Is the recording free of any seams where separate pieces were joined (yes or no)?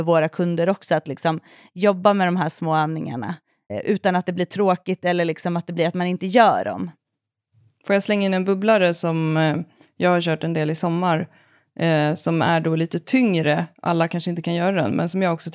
no